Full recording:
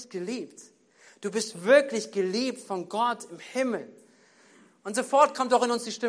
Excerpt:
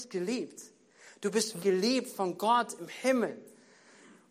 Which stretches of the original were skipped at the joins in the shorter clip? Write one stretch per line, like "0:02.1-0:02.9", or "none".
0:01.6-0:02.1